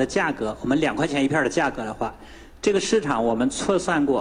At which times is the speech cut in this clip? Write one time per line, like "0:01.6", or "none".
none